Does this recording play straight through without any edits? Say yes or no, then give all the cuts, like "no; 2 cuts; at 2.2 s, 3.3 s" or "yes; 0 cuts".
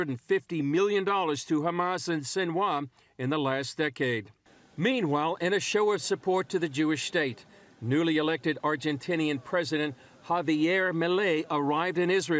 yes; 0 cuts